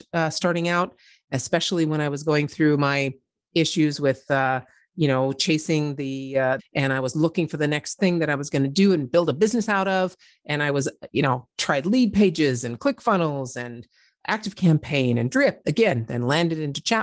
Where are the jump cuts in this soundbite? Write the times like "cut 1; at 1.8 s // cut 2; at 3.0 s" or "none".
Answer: cut 1; at 6.6 s // cut 2; at 15.6 s